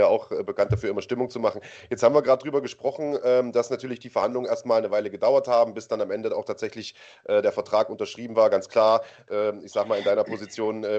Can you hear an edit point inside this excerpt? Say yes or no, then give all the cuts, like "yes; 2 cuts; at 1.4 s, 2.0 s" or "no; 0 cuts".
no; 0 cuts